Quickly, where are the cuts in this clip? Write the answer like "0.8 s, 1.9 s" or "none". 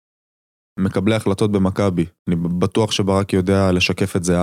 2.2 s